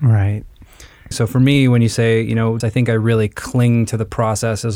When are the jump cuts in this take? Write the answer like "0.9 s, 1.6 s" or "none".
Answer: 1.1 s, 2.6 s

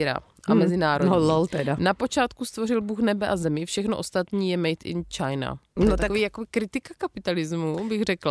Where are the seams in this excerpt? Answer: none

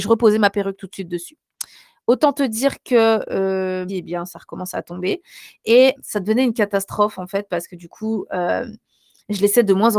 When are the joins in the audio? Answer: 3.9 s, 6.0 s

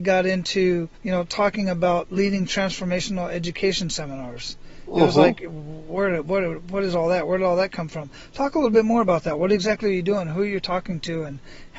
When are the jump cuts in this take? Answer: 1.0 s

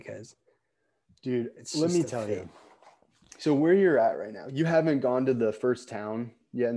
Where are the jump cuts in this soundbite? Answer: none

